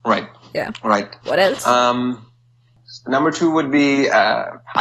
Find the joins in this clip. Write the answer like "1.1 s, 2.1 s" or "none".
1.2 s